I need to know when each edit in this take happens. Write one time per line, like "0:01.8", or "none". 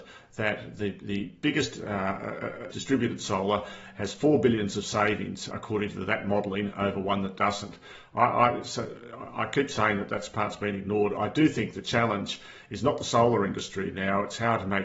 0:02.7
0:05.5